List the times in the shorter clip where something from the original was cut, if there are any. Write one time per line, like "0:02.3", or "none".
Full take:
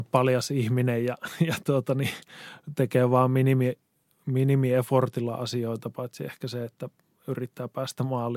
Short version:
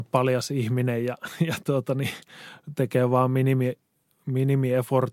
none